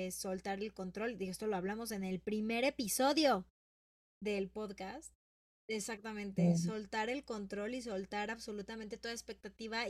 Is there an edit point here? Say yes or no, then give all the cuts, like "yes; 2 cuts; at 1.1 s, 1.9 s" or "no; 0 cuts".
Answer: yes; 1 cut; at 5.6 s